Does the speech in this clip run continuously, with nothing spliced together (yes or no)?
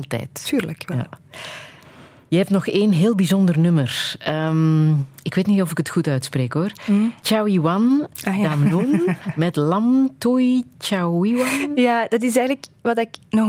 yes